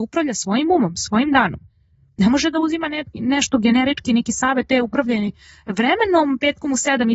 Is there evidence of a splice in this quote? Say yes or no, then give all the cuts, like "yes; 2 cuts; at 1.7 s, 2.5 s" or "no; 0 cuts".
no; 0 cuts